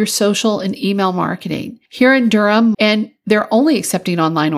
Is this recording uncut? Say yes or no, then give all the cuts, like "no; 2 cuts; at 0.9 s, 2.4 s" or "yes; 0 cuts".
no; 1 cut; at 2.7 s